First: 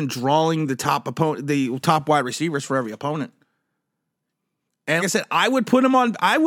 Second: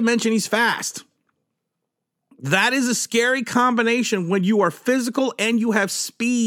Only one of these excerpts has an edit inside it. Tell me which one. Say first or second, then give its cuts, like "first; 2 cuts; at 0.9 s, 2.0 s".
first; 1 cut; at 5.0 s